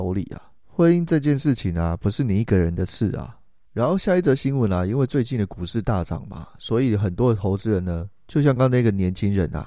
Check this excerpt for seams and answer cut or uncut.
cut